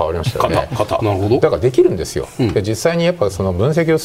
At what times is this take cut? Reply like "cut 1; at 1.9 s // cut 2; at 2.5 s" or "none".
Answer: cut 1; at 1.0 s